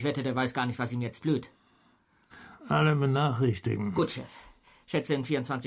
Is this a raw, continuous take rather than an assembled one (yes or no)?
no